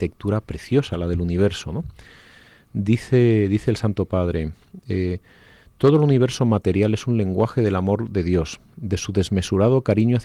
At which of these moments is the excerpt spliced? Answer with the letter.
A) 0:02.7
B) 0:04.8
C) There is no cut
C